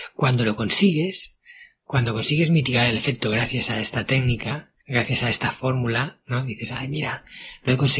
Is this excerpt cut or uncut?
cut